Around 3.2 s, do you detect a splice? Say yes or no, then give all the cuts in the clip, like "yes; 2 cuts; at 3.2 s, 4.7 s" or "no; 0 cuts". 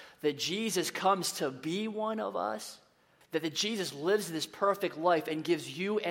yes; 1 cut; at 3.2 s